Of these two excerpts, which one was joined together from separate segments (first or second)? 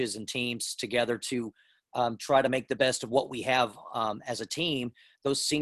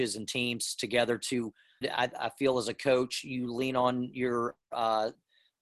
second